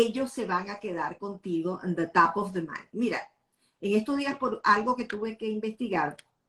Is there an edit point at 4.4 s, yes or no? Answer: no